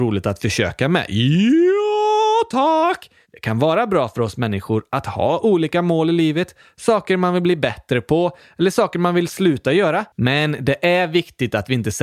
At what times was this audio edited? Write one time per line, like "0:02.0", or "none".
0:10.1